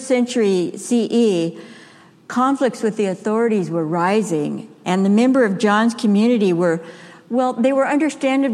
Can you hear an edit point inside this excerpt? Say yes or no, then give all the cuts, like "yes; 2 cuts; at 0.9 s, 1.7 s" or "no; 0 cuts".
no; 0 cuts